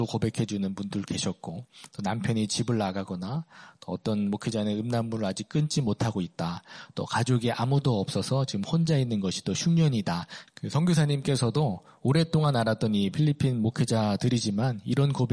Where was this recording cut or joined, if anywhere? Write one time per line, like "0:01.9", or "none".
0:10.5